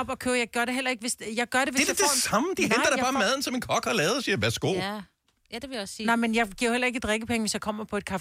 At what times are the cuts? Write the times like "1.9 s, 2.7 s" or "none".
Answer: none